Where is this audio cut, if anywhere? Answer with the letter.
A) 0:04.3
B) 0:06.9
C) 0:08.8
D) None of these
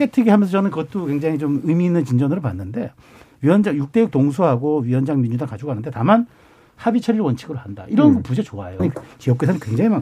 C